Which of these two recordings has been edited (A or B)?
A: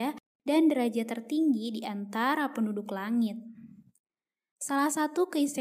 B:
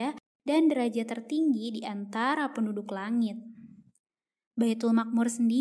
B